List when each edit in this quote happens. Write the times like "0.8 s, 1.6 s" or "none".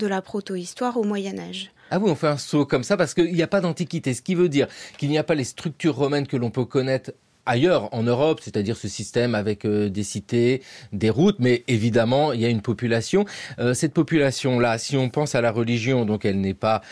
none